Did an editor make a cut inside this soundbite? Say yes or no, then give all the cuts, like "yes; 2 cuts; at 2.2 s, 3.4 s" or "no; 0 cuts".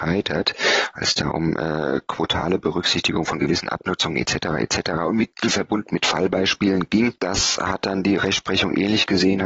no; 0 cuts